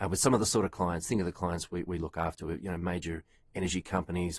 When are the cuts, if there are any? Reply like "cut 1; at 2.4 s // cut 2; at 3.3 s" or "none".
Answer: none